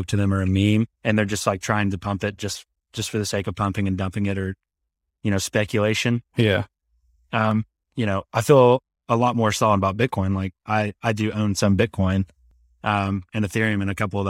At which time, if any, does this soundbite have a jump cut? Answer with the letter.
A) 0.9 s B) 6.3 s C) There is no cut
A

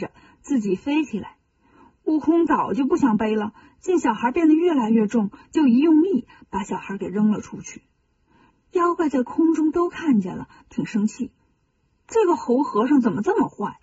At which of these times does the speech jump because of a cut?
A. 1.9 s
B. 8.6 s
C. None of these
C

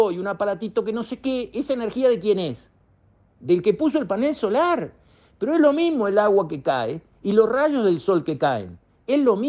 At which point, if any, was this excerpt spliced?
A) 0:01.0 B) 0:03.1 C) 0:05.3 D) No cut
D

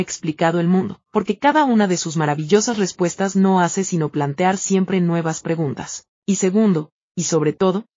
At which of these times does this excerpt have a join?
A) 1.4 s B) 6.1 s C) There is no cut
C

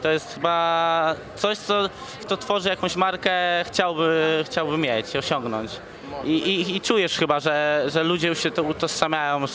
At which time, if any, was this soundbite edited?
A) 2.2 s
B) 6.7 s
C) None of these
A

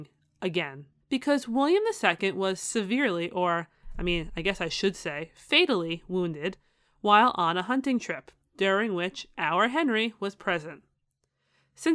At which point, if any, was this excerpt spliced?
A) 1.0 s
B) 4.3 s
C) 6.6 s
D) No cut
A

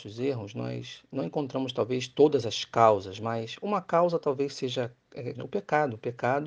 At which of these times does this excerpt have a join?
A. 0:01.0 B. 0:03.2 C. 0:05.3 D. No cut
C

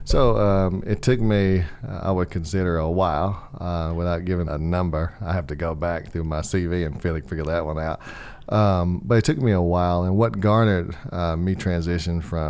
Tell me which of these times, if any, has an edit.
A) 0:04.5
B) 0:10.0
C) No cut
A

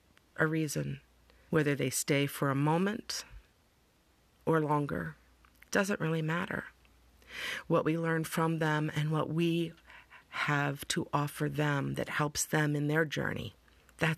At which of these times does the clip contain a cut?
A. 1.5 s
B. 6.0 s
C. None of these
A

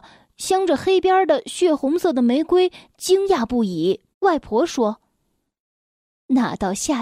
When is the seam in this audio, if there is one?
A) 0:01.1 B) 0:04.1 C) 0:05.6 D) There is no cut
B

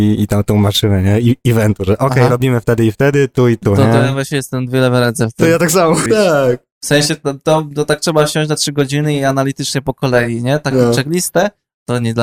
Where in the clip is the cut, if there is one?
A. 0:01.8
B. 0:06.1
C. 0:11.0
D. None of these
B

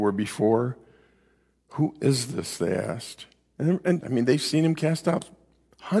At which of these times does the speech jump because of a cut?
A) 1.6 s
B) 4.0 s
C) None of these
B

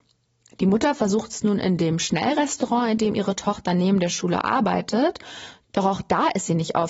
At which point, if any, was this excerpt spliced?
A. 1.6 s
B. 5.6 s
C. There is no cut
C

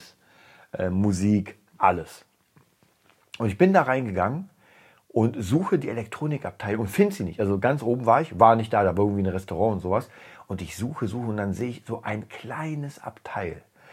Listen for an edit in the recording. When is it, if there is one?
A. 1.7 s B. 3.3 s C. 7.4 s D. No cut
A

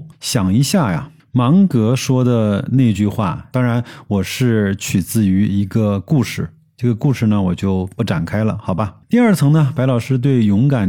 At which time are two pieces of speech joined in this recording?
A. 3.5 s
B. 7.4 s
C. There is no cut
A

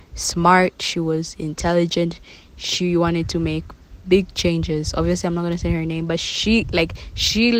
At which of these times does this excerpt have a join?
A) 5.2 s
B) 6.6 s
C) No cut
C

